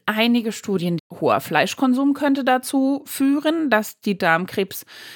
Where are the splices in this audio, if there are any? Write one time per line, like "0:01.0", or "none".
0:01.0